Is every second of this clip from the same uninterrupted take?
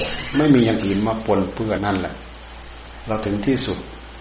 no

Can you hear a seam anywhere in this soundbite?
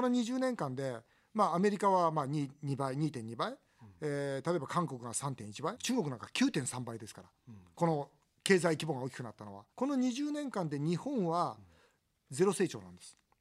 yes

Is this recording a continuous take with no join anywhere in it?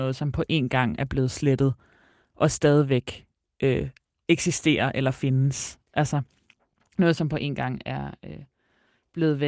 yes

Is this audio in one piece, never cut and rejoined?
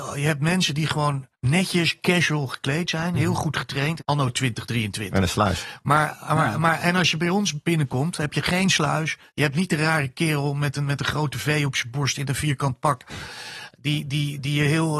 no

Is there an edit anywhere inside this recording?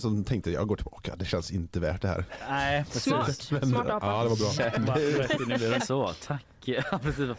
yes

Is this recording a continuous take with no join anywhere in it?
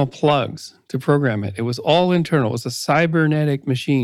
yes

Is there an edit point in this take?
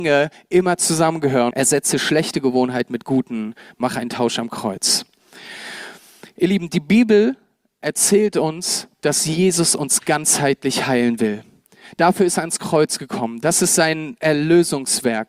yes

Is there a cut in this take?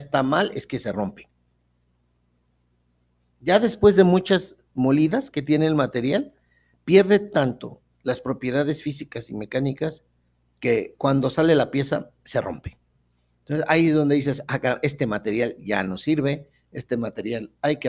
no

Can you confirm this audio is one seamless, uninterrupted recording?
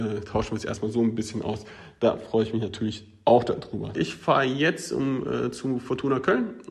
no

